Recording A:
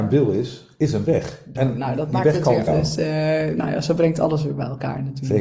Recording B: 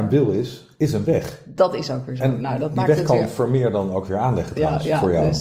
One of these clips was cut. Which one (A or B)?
A